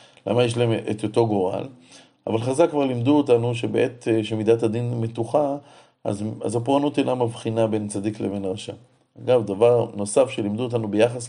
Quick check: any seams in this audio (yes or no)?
no